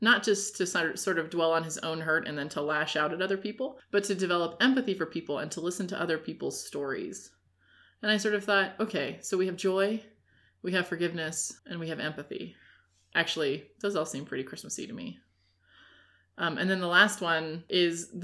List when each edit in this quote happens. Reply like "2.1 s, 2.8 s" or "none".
11.6 s